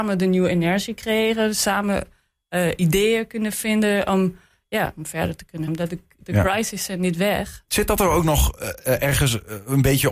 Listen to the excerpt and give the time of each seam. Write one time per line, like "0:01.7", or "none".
0:05.7
0:07.7

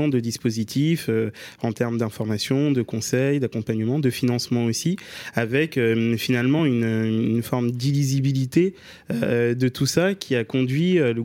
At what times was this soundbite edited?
none

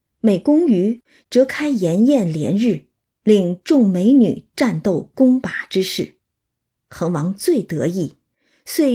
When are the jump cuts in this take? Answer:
0:06.8

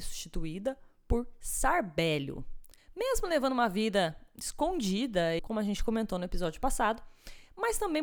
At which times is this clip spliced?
0:02.8
0:05.4

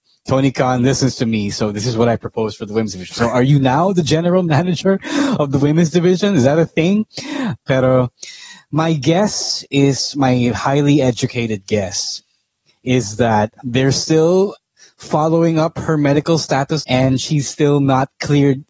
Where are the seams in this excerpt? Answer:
0:07.6
0:16.8

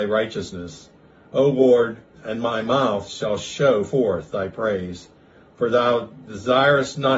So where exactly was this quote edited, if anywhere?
0:02.1

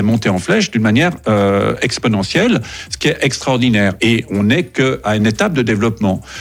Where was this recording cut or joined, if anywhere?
none

